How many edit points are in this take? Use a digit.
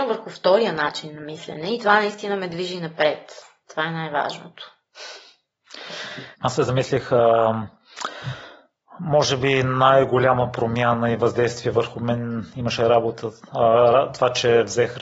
1